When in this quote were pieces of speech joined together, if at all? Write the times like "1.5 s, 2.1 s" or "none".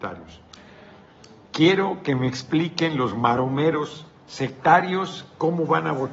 1.5 s, 4.2 s